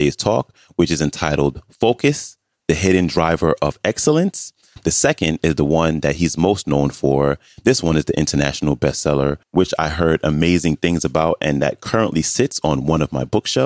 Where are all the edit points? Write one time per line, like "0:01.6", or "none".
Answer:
0:09.4